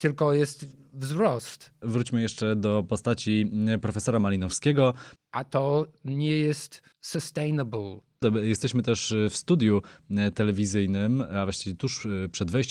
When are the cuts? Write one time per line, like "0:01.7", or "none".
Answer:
0:05.2
0:08.2